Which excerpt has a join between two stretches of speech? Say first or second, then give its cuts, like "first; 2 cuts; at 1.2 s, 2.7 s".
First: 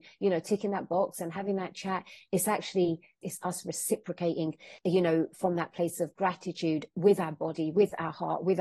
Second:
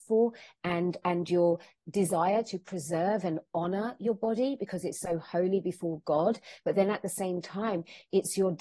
first; 2 cuts; at 3.2 s, 4.8 s